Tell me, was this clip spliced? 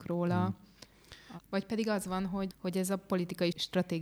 yes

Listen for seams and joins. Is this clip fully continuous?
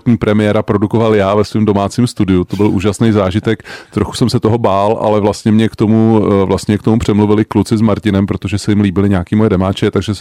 yes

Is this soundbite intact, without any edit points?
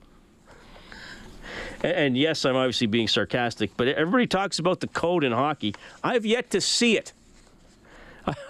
yes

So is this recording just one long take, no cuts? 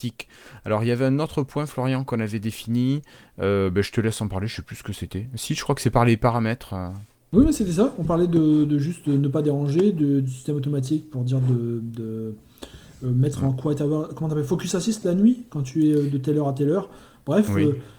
yes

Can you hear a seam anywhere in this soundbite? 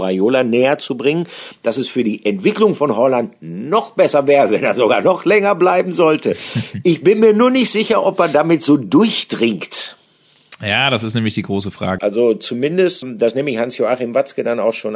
yes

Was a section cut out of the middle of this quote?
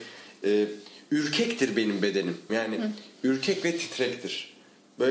yes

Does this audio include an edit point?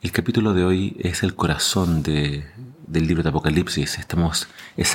no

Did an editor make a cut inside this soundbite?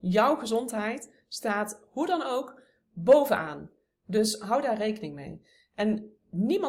no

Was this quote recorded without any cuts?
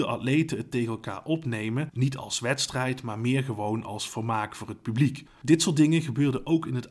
no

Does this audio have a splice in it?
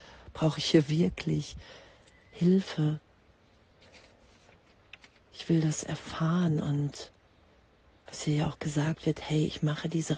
no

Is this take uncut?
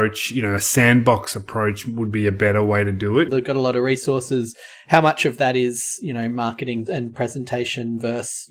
no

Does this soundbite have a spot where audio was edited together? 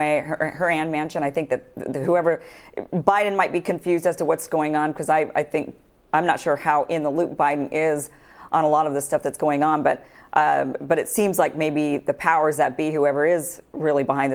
no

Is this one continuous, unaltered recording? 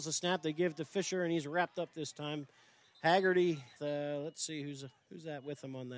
no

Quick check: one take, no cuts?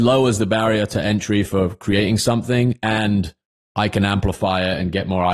yes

